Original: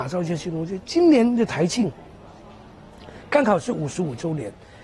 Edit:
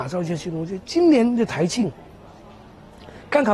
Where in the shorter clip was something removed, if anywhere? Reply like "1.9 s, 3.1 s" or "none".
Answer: none